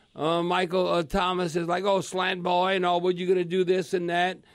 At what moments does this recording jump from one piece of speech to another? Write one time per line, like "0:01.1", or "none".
none